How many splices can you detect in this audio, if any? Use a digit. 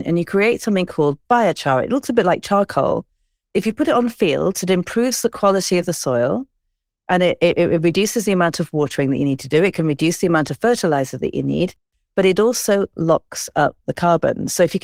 0